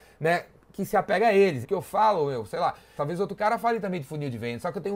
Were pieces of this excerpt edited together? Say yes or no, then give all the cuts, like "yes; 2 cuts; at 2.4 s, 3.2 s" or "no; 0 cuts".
yes; 2 cuts; at 1.6 s, 3.0 s